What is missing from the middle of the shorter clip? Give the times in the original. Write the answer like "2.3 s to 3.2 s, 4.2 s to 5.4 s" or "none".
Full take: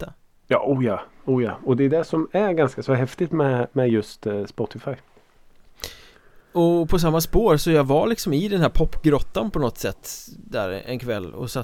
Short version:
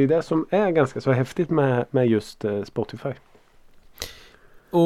none

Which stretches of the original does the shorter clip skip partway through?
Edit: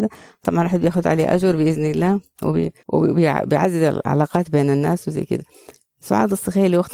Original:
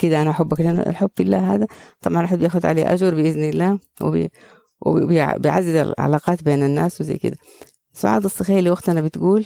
4.4 s to 4.7 s

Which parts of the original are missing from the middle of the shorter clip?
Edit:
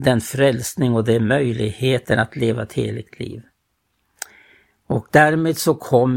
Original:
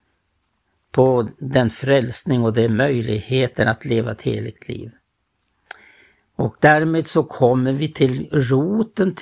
none

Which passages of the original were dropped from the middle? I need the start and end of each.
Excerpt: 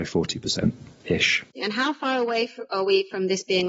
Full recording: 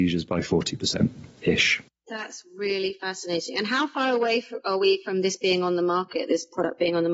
1.9 s to 3.5 s

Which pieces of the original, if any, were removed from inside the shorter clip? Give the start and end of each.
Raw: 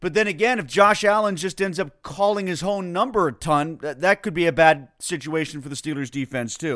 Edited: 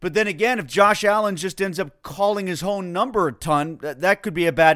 none

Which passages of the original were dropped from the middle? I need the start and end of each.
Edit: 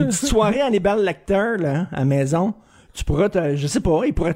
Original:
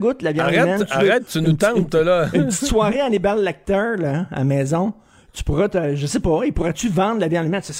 none

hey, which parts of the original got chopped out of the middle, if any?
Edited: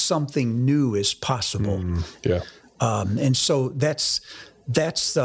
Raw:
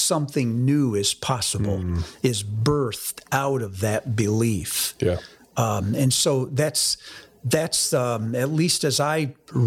2.2 s to 5.0 s

